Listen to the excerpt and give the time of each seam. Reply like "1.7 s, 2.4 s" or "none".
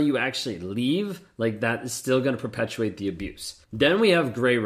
3.6 s